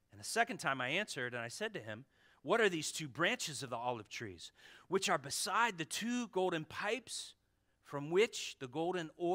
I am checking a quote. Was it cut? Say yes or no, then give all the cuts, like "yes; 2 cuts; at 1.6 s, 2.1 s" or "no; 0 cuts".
no; 0 cuts